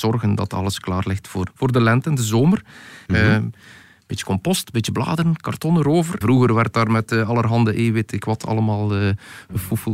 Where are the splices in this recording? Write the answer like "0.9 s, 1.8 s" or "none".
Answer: 1.5 s, 3.1 s, 6.2 s